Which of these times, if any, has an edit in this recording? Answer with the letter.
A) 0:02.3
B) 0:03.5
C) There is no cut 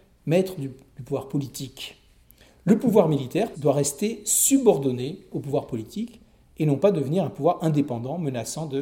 B